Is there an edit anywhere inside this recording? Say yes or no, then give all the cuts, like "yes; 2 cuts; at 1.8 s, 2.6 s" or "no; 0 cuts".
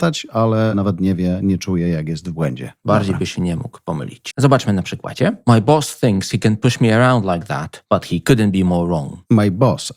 yes; 1 cut; at 4.3 s